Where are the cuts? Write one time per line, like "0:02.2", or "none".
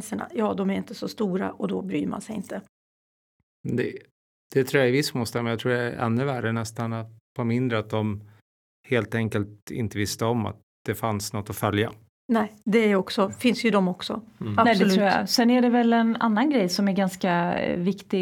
none